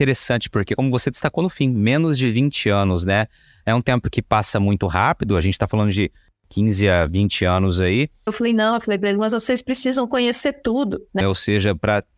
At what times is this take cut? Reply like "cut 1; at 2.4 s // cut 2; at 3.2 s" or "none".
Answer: cut 1; at 8.3 s // cut 2; at 11.2 s